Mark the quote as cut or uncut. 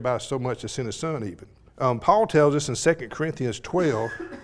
cut